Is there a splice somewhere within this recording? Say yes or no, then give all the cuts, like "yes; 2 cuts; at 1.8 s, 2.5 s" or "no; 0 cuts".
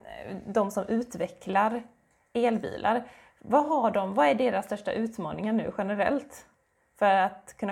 no; 0 cuts